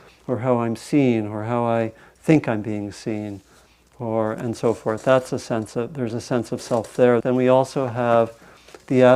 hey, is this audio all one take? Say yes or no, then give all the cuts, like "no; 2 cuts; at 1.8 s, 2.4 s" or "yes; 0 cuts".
no; 1 cut; at 7.2 s